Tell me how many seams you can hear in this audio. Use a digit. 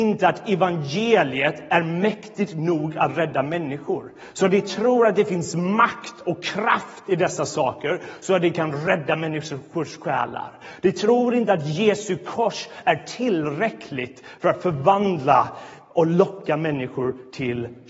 0